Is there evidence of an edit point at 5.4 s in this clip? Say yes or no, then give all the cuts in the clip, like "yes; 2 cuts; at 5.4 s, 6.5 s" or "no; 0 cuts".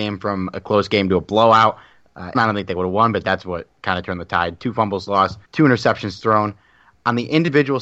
yes; 2 cuts; at 2.3 s, 5.4 s